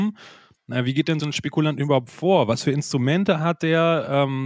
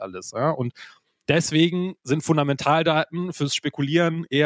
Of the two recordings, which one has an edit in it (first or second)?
first